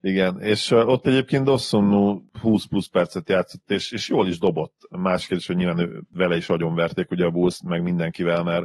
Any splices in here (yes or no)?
no